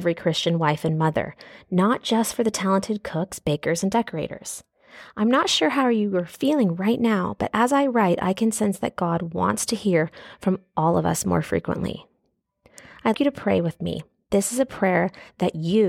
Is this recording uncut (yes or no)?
no